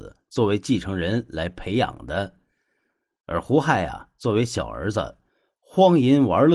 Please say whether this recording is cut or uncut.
uncut